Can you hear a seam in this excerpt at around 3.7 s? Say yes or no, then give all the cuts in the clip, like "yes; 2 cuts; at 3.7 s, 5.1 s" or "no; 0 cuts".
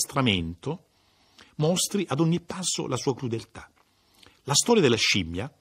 no; 0 cuts